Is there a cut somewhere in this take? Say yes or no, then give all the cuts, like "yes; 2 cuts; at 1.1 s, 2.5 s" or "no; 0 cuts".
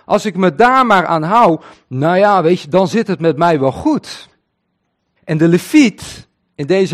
yes; 1 cut; at 5.2 s